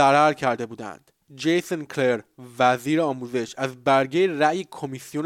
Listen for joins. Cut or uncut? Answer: cut